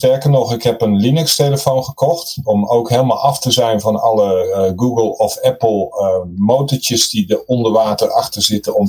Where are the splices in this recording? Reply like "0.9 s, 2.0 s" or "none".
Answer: none